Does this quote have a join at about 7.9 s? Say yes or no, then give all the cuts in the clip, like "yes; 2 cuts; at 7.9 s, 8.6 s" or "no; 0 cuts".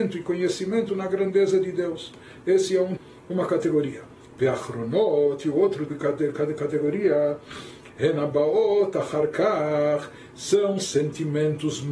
yes; 3 cuts; at 3.0 s, 5.9 s, 7.9 s